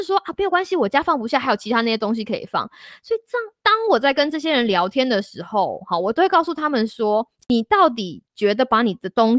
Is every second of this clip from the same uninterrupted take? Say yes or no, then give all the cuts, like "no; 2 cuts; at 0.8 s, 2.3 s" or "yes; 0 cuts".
yes; 0 cuts